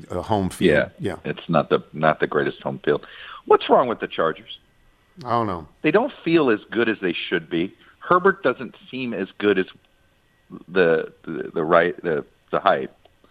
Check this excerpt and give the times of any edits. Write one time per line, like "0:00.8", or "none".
none